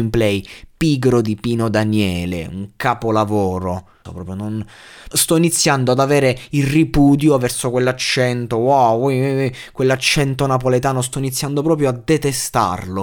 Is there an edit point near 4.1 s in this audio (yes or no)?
yes